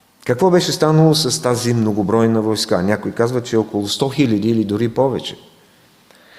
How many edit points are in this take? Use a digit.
0